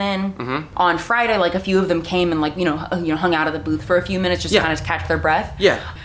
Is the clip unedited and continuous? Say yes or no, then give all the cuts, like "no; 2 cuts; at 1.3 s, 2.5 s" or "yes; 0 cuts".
yes; 0 cuts